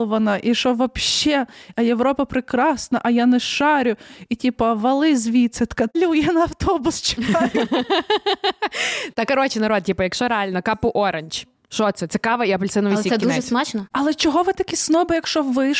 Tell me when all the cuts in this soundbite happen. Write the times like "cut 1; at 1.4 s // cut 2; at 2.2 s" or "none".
cut 1; at 5.9 s